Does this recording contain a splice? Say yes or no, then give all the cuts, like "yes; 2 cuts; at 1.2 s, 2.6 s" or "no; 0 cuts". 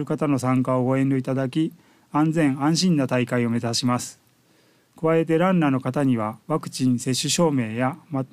yes; 1 cut; at 6.4 s